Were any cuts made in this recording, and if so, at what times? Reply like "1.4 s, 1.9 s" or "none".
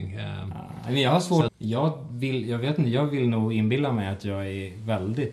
1.5 s